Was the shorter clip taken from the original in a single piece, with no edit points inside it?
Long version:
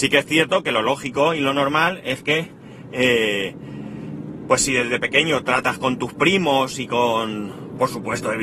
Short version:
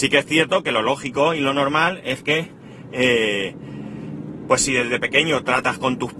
yes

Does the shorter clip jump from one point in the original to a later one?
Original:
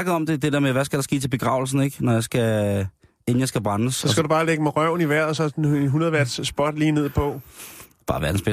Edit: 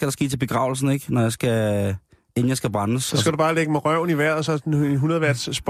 no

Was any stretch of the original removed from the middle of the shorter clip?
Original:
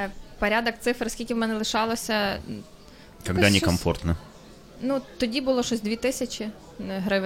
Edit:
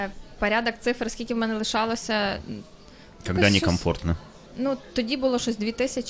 yes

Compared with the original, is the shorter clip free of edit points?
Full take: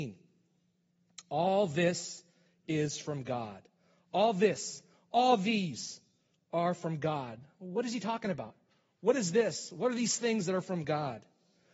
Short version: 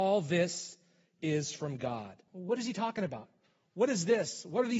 no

